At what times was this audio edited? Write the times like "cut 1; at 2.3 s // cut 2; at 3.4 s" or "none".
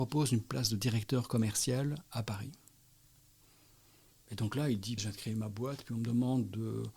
cut 1; at 5.0 s

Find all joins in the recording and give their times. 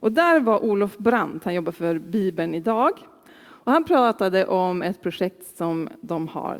cut 1; at 3.3 s

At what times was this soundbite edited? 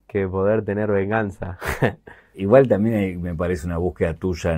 cut 1; at 2.3 s

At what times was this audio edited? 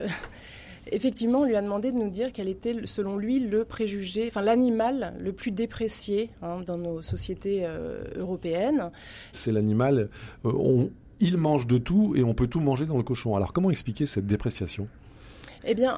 cut 1; at 9.3 s

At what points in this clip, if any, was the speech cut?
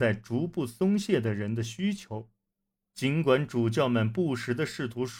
cut 1; at 2.8 s

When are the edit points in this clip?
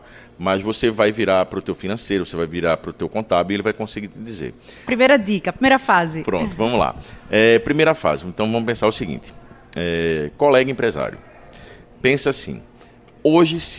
cut 1; at 4.9 s

